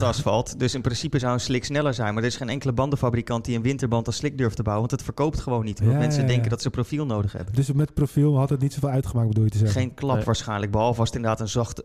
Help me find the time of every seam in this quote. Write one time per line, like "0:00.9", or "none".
none

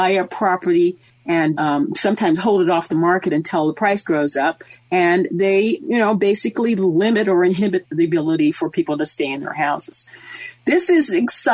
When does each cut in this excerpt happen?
0:01.6
0:05.8
0:07.8

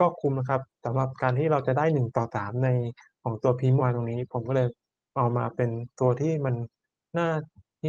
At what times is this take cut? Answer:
0:03.8

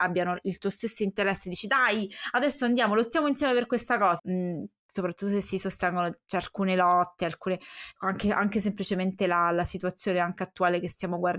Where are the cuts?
0:04.2

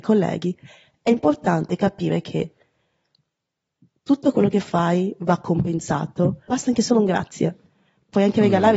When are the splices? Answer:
0:06.5

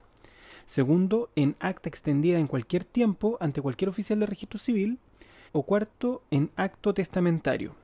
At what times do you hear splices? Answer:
0:05.5

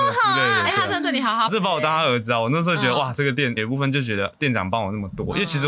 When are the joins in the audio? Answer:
0:01.5
0:03.6

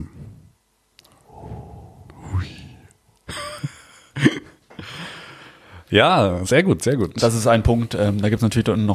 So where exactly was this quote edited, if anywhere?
none

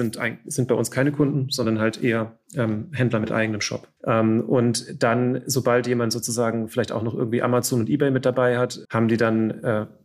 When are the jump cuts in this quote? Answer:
0:04.0
0:08.8

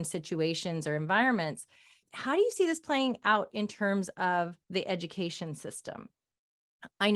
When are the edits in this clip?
0:02.0
0:04.6

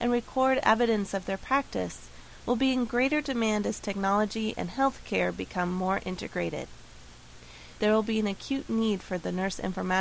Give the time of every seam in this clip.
0:07.7

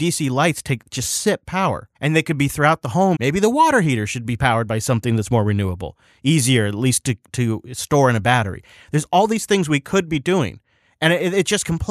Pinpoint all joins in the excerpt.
0:01.9
0:03.1

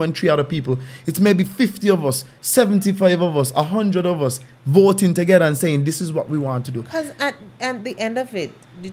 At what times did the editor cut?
none

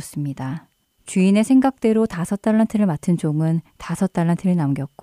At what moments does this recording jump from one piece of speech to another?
0:00.9

